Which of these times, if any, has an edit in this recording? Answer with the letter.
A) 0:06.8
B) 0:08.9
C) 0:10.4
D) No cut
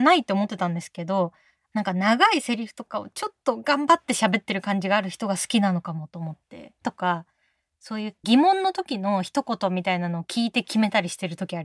A